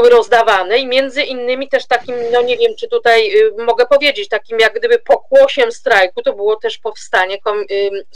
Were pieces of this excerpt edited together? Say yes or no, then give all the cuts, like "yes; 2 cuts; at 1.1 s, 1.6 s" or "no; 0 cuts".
no; 0 cuts